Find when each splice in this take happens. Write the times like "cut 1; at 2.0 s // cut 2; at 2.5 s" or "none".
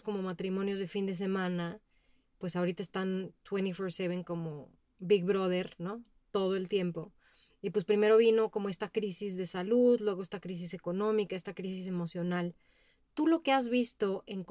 none